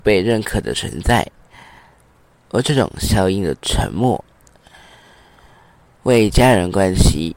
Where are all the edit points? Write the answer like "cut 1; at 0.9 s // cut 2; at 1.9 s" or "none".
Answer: none